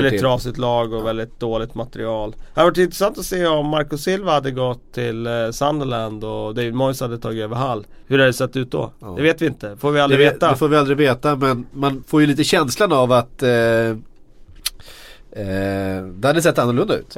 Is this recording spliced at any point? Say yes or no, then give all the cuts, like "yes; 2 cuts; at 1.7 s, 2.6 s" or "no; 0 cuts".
yes; 2 cuts; at 8.0 s, 12.0 s